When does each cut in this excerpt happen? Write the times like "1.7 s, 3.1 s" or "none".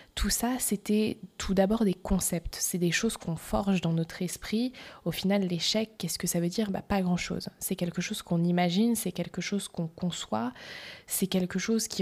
none